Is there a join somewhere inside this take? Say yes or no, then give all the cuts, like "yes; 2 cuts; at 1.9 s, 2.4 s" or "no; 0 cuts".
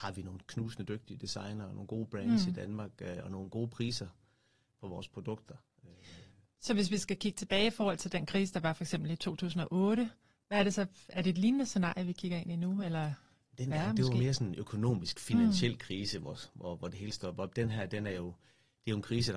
no; 0 cuts